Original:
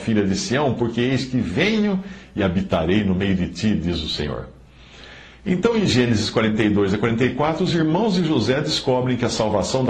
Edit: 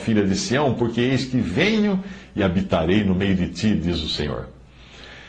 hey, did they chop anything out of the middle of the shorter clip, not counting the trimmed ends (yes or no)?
no